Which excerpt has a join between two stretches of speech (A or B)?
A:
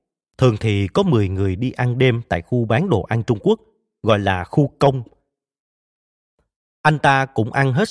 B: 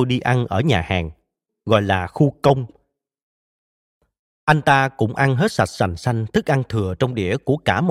B